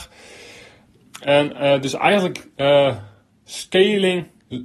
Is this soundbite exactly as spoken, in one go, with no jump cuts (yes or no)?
yes